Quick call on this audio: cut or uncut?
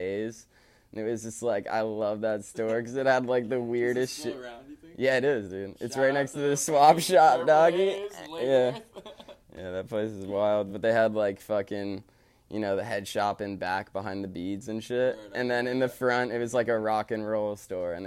uncut